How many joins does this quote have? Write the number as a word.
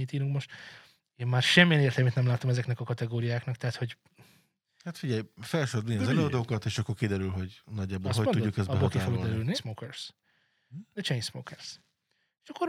one